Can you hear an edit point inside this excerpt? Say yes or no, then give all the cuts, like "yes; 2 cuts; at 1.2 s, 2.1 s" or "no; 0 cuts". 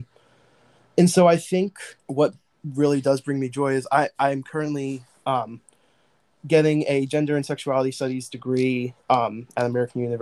yes; 1 cut; at 2.0 s